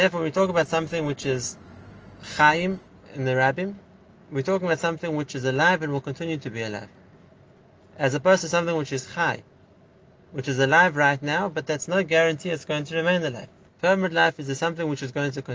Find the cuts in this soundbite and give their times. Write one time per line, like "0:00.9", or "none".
0:13.7